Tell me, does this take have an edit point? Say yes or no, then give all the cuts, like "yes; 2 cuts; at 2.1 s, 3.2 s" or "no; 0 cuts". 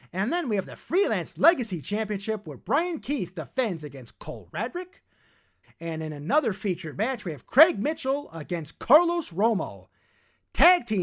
yes; 1 cut; at 5.6 s